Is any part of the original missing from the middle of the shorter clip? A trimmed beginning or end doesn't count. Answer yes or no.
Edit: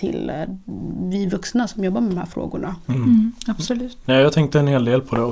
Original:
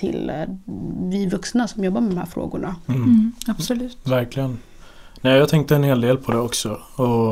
yes